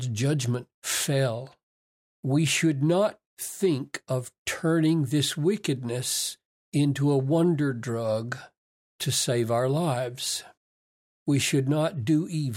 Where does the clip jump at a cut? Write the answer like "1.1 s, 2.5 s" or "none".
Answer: none